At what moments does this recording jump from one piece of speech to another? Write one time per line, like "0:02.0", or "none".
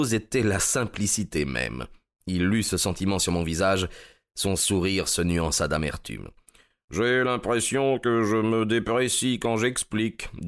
none